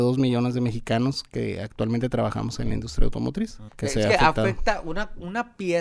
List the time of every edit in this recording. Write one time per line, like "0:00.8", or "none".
0:03.7